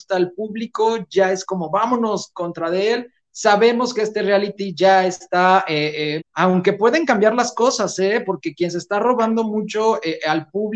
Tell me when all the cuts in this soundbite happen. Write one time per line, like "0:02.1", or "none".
0:06.2